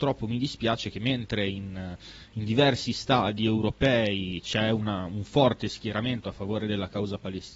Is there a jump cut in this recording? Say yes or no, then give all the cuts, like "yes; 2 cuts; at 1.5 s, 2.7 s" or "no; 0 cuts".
no; 0 cuts